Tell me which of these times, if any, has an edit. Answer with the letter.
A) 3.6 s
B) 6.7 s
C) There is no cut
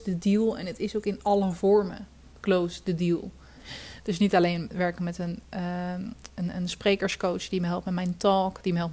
A